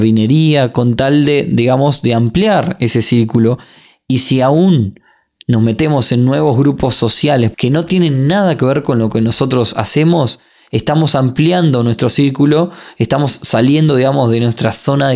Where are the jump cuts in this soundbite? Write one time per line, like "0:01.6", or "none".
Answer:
0:07.5